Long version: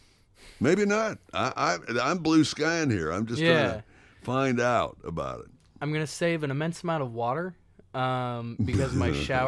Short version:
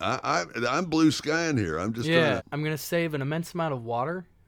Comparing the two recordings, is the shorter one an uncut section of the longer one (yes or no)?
no